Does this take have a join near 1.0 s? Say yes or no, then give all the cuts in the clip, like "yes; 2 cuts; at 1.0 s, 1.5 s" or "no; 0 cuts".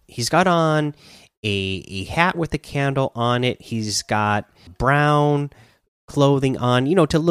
no; 1 cut; at 4.7 s